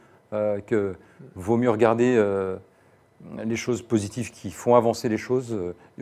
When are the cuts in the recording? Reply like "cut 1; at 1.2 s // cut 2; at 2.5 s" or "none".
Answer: none